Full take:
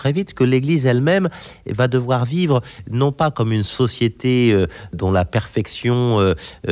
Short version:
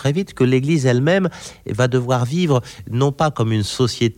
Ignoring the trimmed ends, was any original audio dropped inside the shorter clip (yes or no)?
no